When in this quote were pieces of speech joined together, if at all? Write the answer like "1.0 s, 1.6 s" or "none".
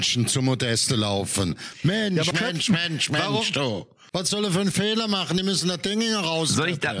2.3 s, 4.1 s